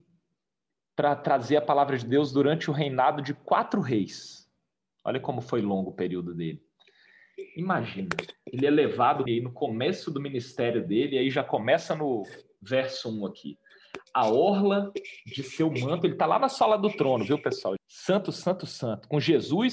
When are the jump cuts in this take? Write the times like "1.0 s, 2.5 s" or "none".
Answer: 9.3 s, 17.8 s